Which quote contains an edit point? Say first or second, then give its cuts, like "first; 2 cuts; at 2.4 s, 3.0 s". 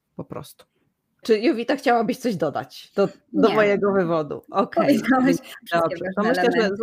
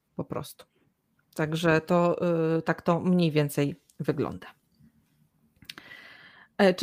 first; 2 cuts; at 1.2 s, 5.7 s